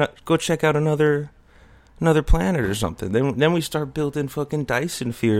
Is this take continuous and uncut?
yes; 0 cuts

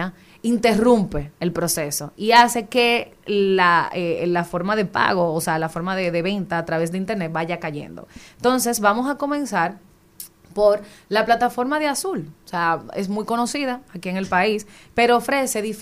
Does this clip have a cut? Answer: no; 0 cuts

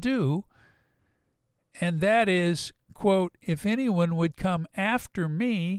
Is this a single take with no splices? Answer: yes; 0 cuts

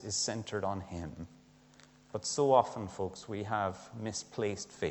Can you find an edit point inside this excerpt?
no; 0 cuts

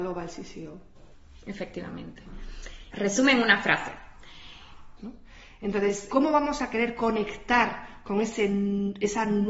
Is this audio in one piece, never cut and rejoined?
no; 3 cuts; at 2.9 s, 5.0 s, 6.1 s

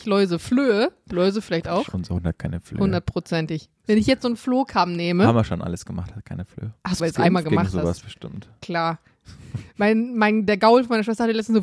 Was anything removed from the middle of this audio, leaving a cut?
yes; 1 cut; at 7.0 s

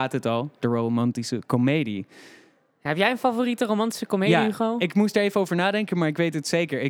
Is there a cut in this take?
no; 0 cuts

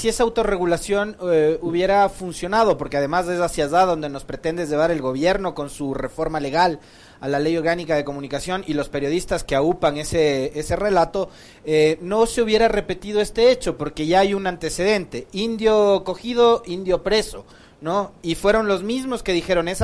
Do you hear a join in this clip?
no; 0 cuts

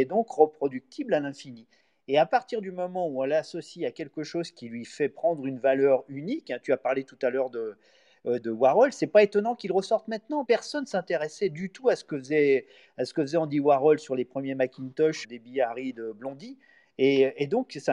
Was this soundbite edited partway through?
yes; 3 cuts; at 8.4 s, 10.4 s, 15.2 s

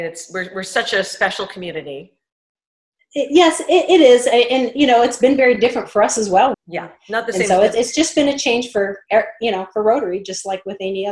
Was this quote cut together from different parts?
yes; 1 cut; at 6.5 s

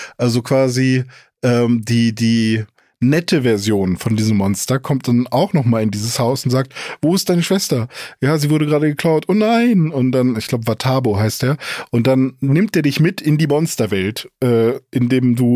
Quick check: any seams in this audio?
no; 0 cuts

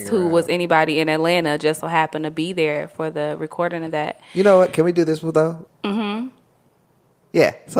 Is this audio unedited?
no; 1 cut; at 5.7 s

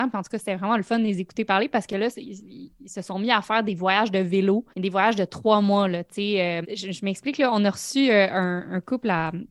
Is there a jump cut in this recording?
yes; 2 cuts; at 4.7 s, 6.6 s

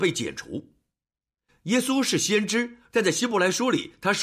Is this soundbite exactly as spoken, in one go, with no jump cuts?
yes; 0 cuts

